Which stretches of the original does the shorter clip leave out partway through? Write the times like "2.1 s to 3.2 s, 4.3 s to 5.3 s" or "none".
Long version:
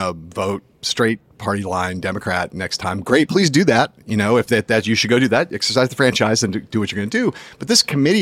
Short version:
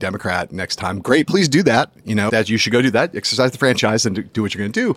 4.3 s to 4.7 s